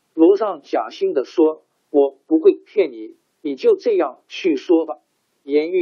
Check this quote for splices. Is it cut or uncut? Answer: cut